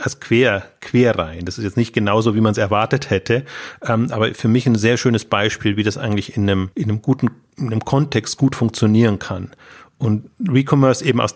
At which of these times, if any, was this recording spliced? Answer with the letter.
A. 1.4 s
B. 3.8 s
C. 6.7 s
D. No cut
C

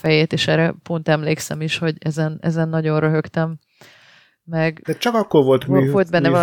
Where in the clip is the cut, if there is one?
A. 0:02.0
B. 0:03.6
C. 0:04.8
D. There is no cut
C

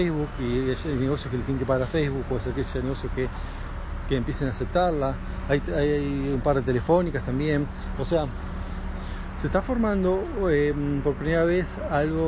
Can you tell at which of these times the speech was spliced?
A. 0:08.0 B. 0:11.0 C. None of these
C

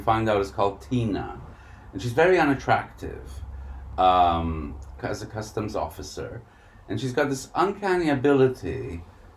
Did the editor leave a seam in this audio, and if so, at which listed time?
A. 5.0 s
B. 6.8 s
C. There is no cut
A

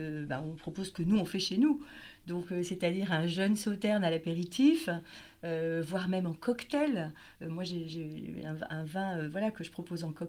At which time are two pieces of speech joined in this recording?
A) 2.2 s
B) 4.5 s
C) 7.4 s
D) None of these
D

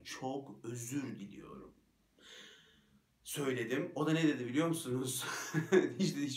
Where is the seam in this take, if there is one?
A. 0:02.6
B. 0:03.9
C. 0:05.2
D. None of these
D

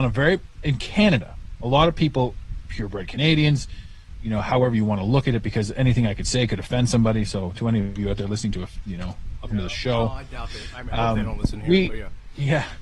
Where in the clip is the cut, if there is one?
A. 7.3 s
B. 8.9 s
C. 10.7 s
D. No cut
B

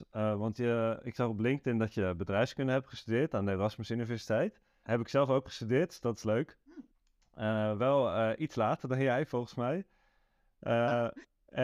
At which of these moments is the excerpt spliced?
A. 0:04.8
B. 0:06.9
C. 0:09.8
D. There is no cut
A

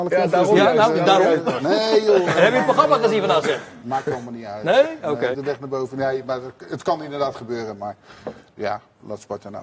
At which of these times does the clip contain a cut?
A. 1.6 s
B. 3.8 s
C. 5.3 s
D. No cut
C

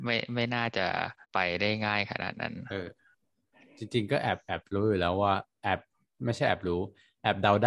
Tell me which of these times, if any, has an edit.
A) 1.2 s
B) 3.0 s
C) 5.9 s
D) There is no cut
A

